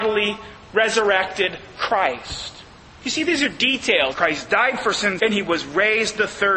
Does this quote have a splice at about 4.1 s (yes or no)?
yes